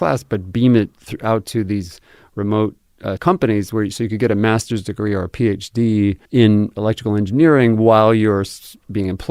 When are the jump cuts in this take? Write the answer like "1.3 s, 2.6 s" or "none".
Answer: 3.2 s, 6.2 s